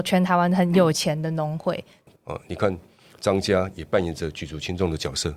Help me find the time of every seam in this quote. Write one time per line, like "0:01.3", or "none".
0:02.2

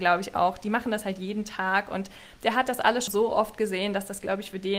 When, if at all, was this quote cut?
0:03.1

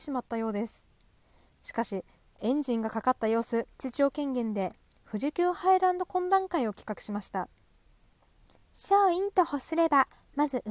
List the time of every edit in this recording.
0:02.3
0:03.7

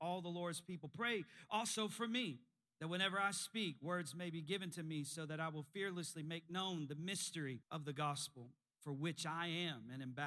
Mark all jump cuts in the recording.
0:07.6

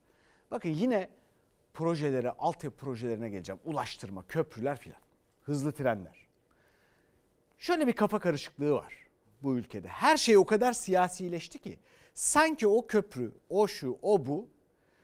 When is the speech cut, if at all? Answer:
0:13.4

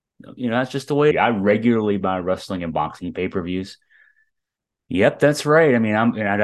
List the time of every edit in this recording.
0:01.1

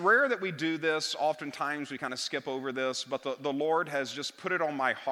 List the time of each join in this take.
none

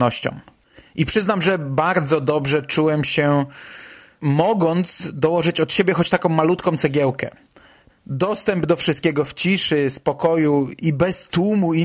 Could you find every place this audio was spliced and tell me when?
0:07.9
0:10.8

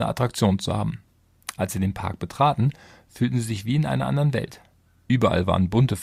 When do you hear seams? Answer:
none

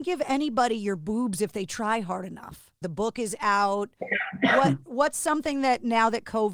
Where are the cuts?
0:02.8

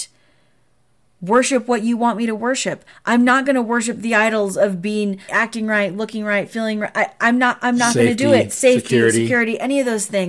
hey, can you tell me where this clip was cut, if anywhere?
0:05.3

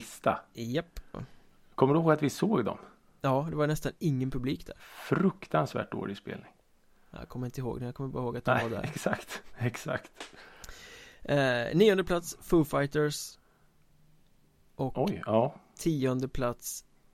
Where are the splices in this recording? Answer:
0:01.1

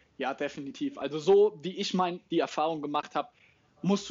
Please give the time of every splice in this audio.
none

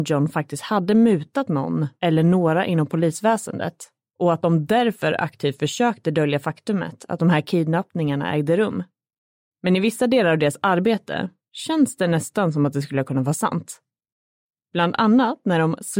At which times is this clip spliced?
0:09.5

